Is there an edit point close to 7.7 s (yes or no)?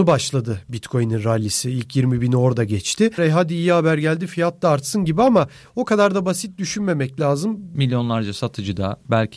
yes